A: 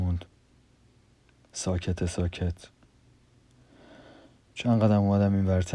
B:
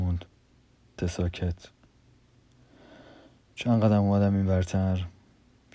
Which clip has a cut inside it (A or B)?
B